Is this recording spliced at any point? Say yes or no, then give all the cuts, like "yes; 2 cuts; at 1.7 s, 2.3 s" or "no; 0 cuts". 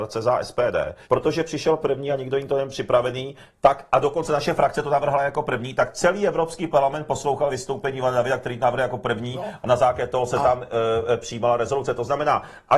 yes; 1 cut; at 1.0 s